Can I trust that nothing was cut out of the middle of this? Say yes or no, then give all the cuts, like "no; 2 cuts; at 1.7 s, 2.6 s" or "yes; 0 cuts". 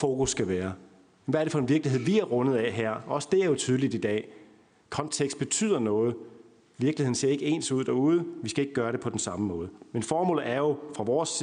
yes; 0 cuts